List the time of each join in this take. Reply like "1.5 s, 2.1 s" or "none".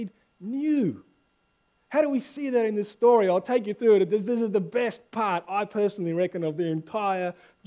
none

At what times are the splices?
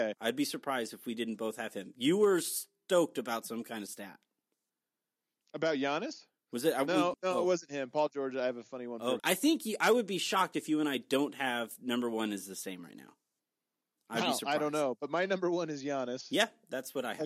7.1 s, 9.2 s

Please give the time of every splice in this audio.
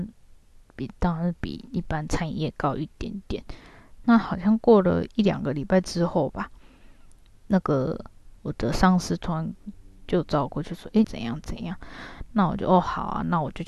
4.0 s, 11.0 s

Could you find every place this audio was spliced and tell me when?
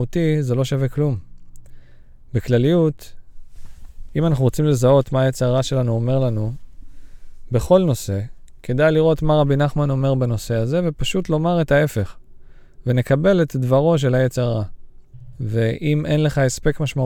2.2 s, 15.3 s

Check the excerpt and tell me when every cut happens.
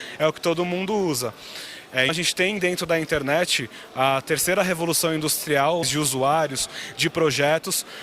2.1 s, 5.8 s

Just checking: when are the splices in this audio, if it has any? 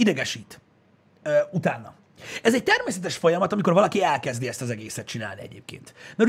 none

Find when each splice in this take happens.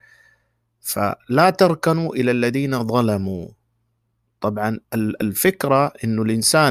4.8 s

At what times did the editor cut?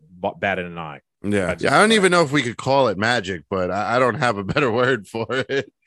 1.6 s

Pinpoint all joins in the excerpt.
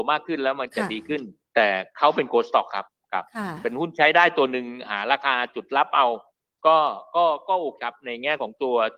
7.8 s

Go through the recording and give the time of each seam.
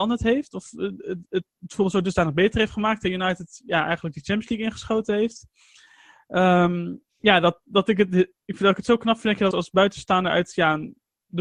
7.6 s, 9.5 s

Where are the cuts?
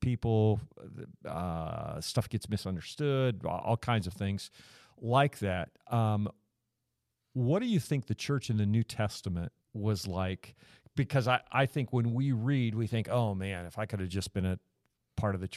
9.6 s

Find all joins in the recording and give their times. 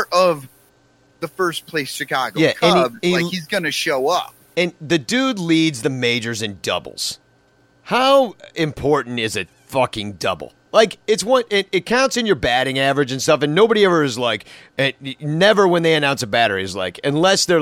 none

